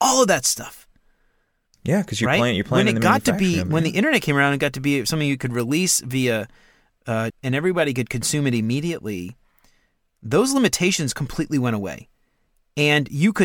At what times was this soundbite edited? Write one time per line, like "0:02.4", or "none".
0:07.3